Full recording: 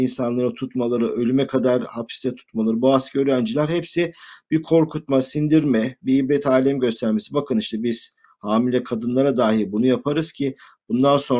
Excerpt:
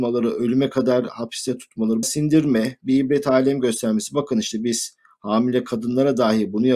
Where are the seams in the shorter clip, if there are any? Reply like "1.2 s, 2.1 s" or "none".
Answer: 2.0 s